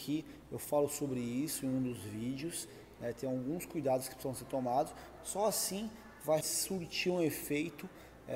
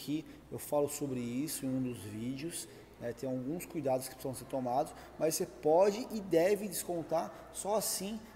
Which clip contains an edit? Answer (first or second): first